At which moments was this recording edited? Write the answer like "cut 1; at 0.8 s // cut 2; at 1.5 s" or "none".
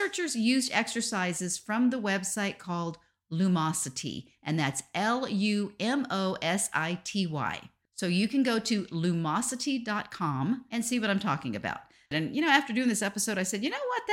cut 1; at 12.1 s